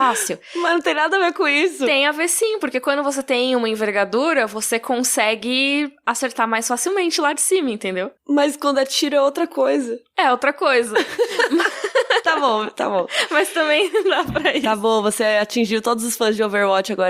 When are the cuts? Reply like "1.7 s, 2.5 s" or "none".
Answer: none